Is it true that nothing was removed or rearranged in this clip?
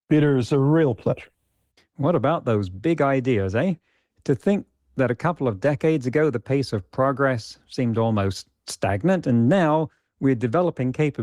no; 1 cut; at 1.8 s

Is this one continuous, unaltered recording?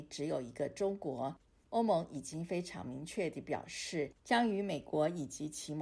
no; 2 cuts; at 1.6 s, 4.2 s

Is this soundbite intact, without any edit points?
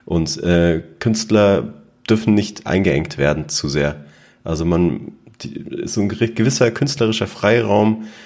yes; 0 cuts

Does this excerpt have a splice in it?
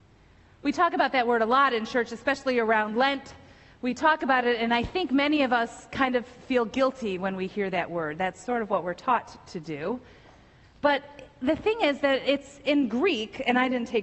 no; 0 cuts

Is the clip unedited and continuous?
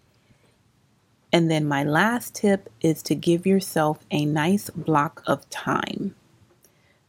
yes; 0 cuts

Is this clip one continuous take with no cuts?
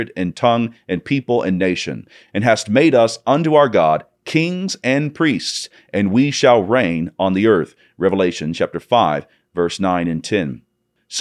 yes; 0 cuts

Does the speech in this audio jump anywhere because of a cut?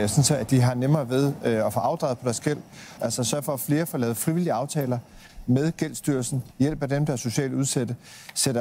yes; 2 cuts; at 3.0 s, 6.5 s

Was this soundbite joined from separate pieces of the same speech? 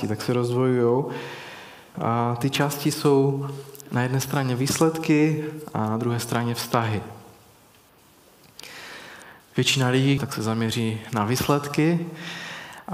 yes; 2 cuts; at 1.9 s, 10.2 s

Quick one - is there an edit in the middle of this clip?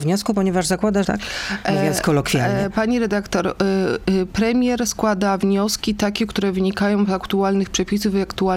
yes; 1 cut; at 1.0 s

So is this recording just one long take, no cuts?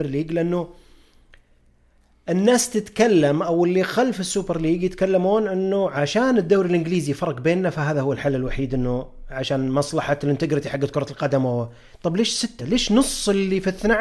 yes; 0 cuts

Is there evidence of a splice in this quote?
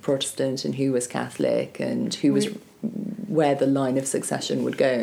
no; 0 cuts

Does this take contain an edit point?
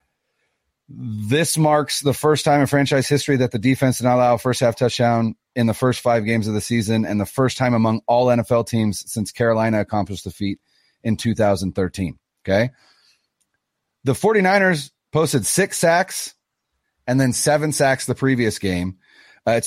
no; 0 cuts

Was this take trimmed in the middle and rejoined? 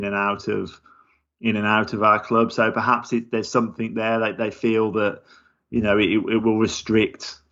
no; 0 cuts

